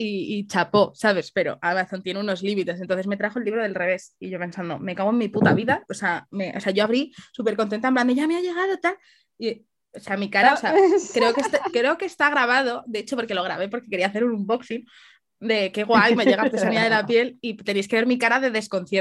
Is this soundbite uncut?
yes; 0 cuts

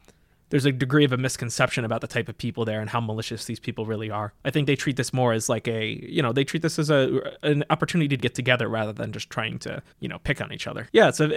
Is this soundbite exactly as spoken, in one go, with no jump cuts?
no; 3 cuts; at 4.4 s, 8.2 s, 9.9 s

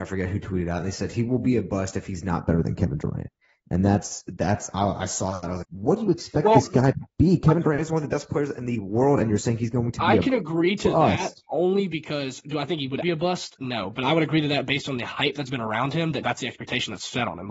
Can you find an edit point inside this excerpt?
yes; 3 cuts; at 5.6 s, 13.0 s, 16.2 s

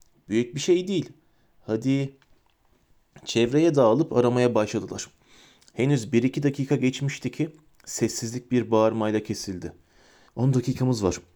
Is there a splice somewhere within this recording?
yes; 1 cut; at 10.3 s

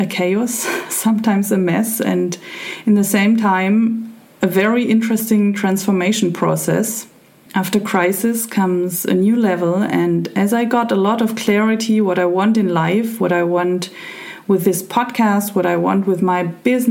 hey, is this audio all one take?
no; 1 cut; at 7.5 s

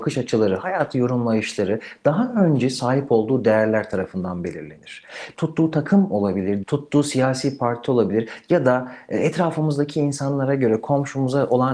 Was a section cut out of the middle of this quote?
yes; 2 cuts; at 5.3 s, 6.6 s

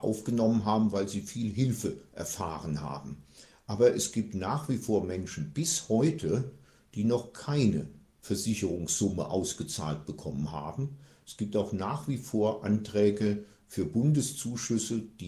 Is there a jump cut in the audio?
no; 0 cuts

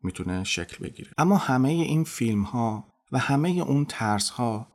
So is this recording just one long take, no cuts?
no; 1 cut; at 1.1 s

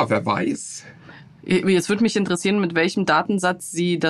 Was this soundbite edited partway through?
no; 0 cuts

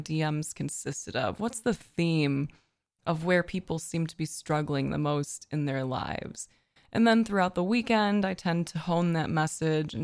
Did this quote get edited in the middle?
no; 0 cuts

